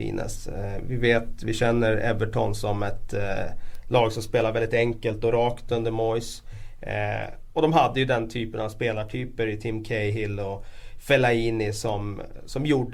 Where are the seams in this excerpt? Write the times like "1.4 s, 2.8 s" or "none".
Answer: none